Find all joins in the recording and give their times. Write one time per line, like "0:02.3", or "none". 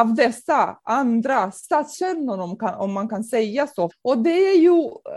0:03.9